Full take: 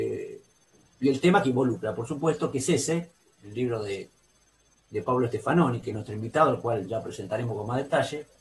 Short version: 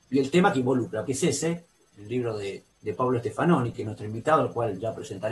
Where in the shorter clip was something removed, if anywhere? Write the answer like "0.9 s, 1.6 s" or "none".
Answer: 1.1 s, 2.7 s